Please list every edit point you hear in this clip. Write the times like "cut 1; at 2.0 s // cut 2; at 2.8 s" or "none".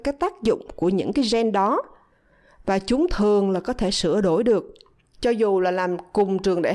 cut 1; at 5.1 s